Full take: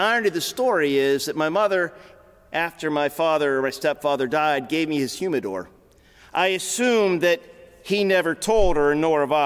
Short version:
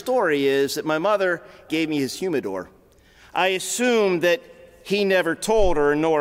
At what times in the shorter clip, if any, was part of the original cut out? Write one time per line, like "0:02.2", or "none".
0:01.7